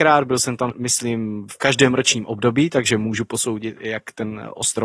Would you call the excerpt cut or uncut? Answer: uncut